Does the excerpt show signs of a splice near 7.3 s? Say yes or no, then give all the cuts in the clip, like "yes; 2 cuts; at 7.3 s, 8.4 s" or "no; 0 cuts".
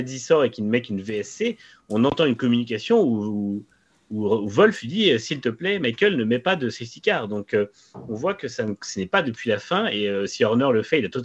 no; 0 cuts